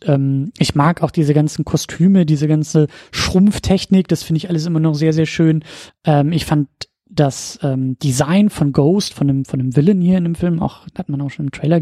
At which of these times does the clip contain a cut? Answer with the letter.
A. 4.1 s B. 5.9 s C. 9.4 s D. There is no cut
B